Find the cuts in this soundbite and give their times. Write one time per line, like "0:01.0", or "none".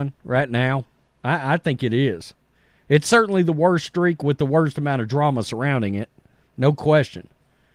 none